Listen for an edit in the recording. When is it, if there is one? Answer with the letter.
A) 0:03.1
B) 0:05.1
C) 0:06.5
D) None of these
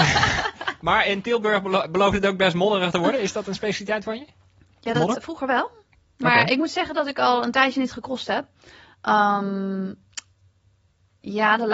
B